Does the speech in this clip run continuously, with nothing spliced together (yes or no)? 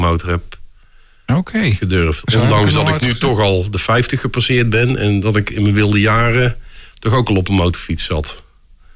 yes